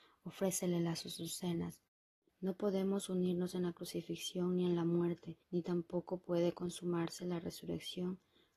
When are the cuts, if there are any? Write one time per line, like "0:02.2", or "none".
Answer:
0:02.3
0:05.4